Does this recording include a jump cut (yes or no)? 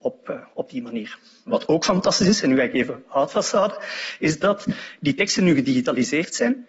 no